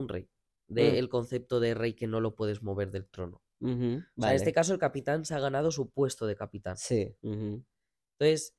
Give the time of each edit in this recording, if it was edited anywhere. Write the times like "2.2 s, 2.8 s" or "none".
7.2 s